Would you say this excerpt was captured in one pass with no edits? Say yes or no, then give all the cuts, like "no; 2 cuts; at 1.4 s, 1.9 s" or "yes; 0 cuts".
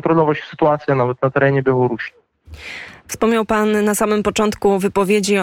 yes; 0 cuts